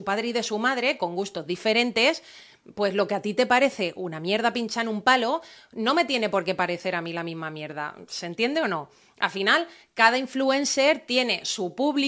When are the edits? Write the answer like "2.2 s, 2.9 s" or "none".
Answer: none